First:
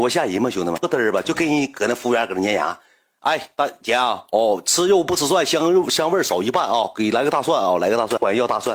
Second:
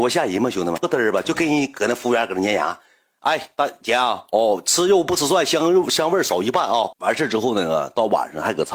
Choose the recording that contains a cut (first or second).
second